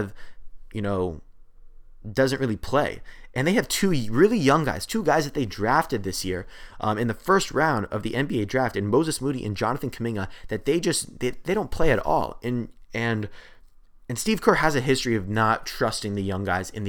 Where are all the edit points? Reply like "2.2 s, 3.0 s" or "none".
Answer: none